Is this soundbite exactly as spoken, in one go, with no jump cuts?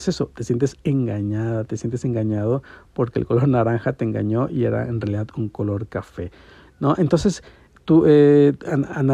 yes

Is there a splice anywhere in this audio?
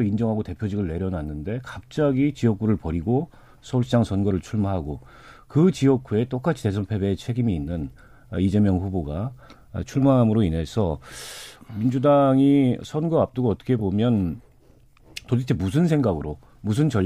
no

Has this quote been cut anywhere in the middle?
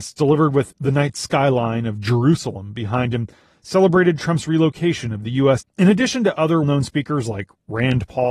yes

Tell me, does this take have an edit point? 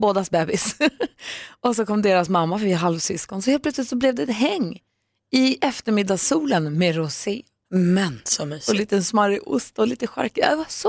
no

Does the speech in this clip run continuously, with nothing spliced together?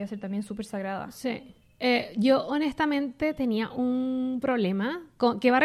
yes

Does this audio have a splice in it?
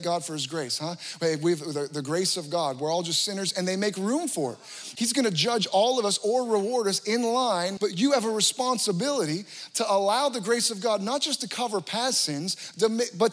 yes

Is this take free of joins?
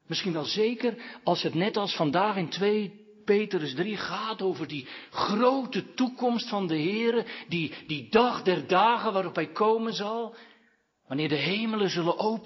yes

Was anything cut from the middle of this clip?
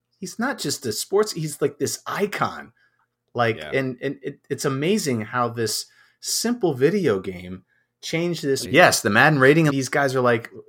yes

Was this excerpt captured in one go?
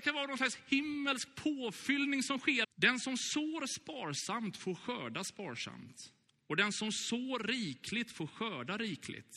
no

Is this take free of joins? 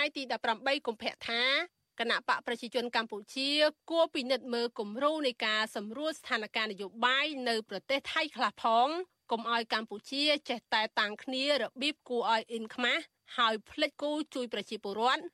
no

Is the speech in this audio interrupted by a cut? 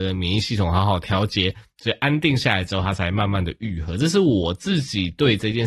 no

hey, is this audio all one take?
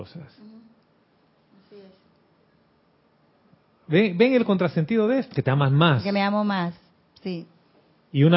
no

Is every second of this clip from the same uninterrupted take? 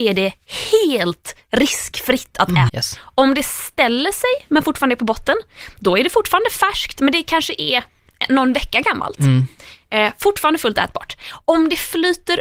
no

